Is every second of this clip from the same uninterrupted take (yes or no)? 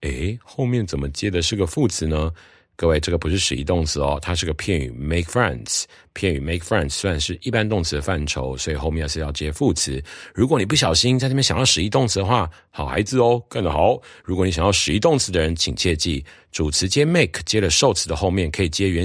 yes